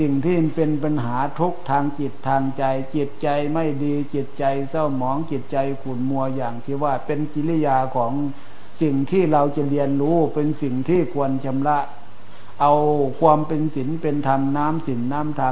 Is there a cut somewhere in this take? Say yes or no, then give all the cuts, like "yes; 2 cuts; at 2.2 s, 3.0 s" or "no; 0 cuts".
no; 0 cuts